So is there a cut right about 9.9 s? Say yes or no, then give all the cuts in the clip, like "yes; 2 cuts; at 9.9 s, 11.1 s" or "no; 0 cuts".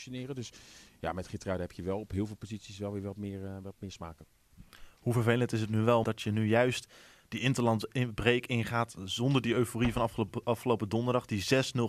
no; 1 cut; at 6.0 s